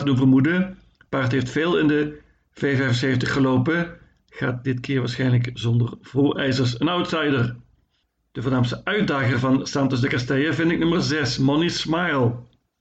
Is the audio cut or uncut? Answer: uncut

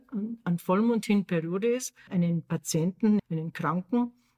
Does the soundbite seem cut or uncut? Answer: cut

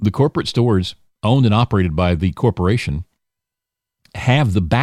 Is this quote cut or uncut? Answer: uncut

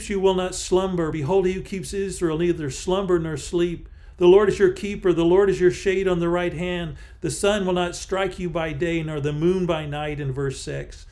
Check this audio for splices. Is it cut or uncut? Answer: uncut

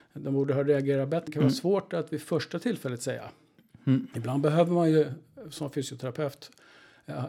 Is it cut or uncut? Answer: cut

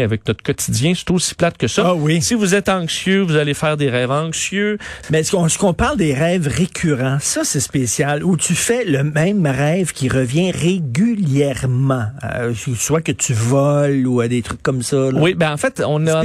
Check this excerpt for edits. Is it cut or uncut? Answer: cut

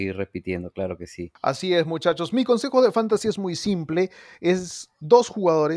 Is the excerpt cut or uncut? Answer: uncut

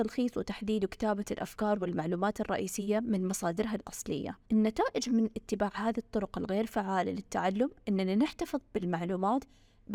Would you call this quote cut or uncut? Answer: cut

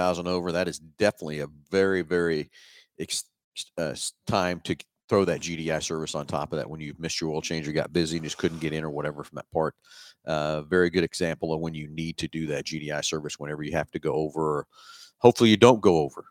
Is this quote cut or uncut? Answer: uncut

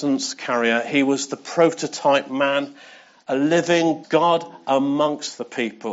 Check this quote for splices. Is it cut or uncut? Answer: cut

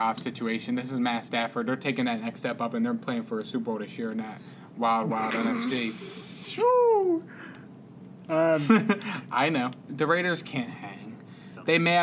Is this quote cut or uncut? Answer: cut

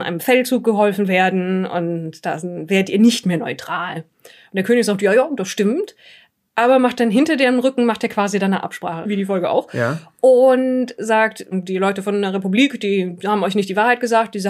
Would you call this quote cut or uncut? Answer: cut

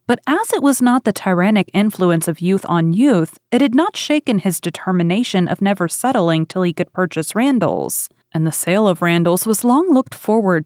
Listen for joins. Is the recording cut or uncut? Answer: uncut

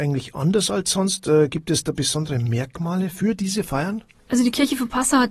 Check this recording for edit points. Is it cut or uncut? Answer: uncut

